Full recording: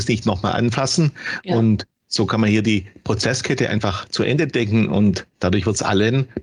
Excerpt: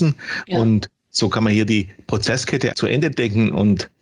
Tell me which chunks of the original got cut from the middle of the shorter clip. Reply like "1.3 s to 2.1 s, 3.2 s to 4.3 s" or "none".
3.7 s to 4.1 s